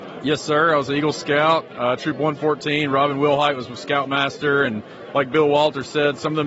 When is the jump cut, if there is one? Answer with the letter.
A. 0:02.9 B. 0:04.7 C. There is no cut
C